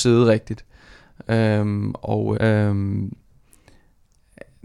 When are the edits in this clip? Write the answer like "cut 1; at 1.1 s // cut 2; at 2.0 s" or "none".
cut 1; at 2.3 s